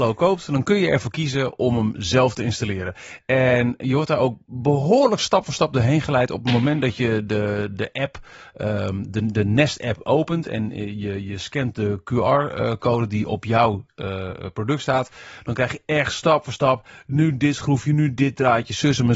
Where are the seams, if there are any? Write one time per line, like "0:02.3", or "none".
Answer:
none